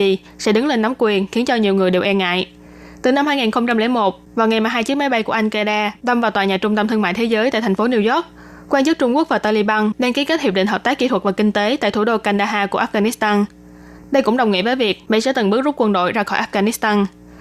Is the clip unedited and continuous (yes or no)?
no